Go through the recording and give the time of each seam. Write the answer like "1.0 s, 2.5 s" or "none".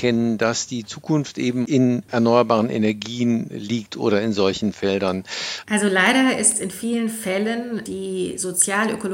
5.6 s, 7.9 s